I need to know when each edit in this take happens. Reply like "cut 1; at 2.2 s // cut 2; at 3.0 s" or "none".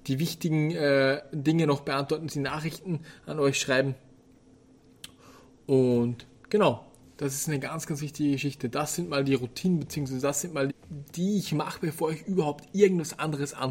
cut 1; at 2.3 s // cut 2; at 10.7 s